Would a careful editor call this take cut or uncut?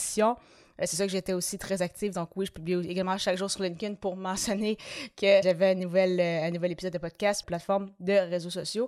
cut